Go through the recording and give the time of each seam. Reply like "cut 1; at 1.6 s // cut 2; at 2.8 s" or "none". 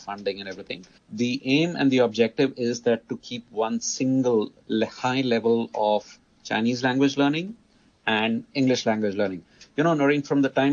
cut 1; at 1.0 s